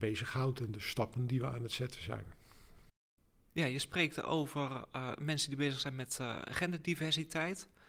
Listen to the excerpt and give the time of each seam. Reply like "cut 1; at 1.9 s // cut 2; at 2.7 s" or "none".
none